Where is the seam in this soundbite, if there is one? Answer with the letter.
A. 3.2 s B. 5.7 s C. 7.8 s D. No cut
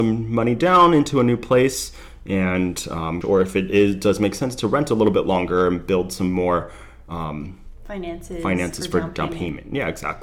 A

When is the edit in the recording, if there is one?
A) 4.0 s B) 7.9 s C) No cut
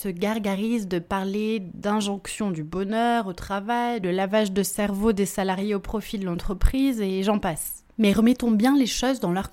A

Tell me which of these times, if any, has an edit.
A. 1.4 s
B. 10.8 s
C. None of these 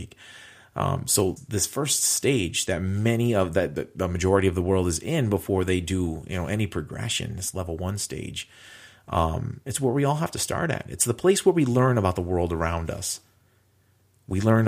A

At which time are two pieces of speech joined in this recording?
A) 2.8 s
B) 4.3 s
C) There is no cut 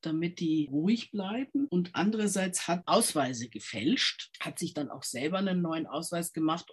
A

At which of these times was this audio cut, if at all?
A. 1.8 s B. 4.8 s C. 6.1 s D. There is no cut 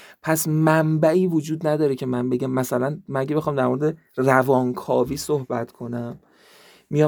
D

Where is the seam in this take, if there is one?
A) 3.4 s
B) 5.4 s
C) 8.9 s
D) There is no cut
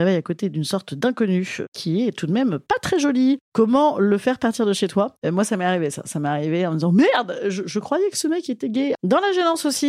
C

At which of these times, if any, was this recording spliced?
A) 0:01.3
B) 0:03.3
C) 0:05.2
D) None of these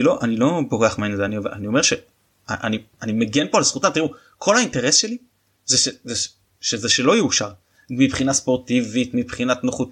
D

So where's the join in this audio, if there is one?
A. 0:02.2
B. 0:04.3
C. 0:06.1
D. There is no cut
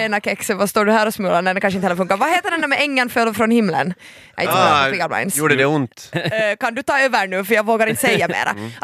C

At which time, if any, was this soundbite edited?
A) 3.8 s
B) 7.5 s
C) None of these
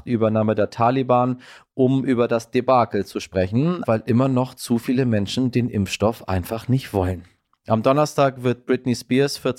A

